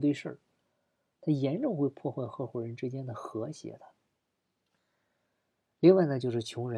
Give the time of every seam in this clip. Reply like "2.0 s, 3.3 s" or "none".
none